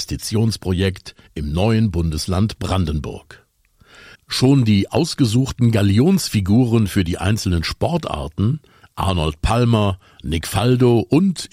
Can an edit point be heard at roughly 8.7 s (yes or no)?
no